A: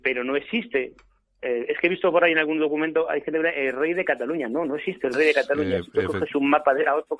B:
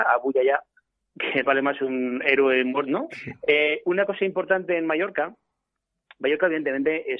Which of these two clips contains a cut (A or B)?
B